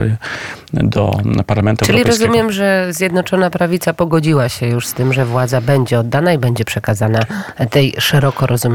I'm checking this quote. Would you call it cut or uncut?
uncut